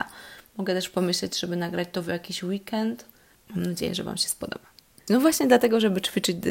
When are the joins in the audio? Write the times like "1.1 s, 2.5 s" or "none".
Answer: 3.3 s, 5.1 s